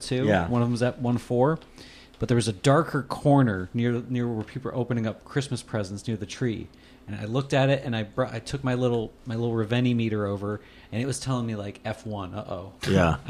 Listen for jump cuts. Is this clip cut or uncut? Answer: uncut